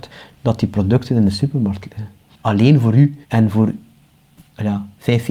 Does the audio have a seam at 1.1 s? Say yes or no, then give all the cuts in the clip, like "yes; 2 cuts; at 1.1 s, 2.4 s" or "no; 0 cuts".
no; 1 cut; at 3.2 s